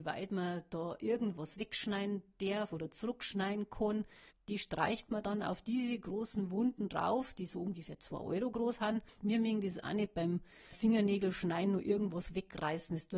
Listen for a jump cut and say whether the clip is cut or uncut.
cut